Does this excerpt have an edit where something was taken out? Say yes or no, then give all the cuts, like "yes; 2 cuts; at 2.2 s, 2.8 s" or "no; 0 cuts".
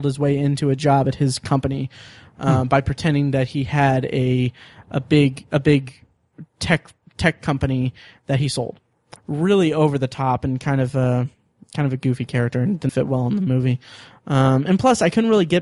yes; 2 cuts; at 9.2 s, 12.9 s